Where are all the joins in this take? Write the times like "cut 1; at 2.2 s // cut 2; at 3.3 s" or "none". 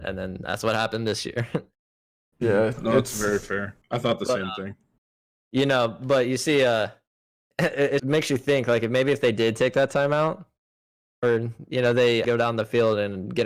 cut 1; at 3.8 s // cut 2; at 8.0 s // cut 3; at 12.2 s